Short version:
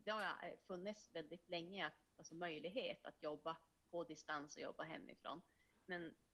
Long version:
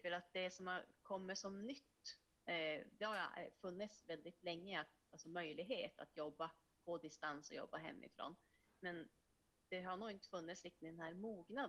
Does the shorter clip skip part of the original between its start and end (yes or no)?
no